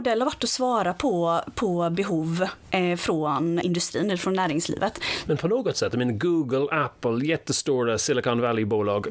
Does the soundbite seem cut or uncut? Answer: cut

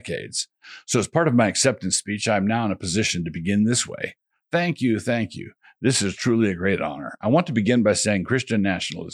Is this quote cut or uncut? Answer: uncut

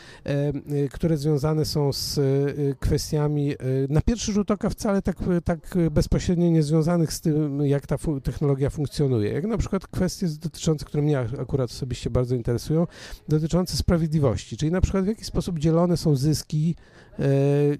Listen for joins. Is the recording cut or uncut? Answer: uncut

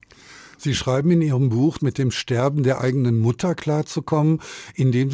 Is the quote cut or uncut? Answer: cut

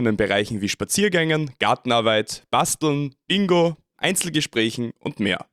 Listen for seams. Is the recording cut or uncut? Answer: cut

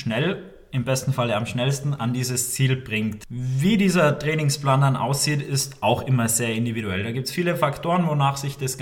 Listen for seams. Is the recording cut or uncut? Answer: uncut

